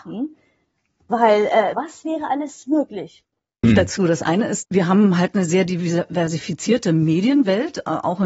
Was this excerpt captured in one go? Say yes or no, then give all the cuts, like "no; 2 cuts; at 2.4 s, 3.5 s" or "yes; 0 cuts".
no; 3 cuts; at 1.7 s, 3.6 s, 4.6 s